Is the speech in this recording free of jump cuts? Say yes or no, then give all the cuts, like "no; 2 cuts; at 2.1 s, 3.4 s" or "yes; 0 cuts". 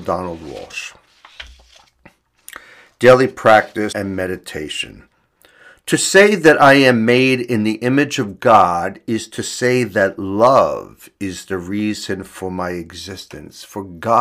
no; 1 cut; at 3.9 s